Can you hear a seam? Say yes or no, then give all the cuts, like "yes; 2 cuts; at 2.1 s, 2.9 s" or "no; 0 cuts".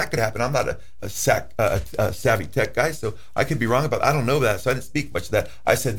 yes; 1 cut; at 1.0 s